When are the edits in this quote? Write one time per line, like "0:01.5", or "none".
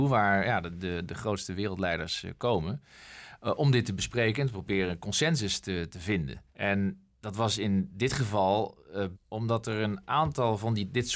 0:06.5
0:09.2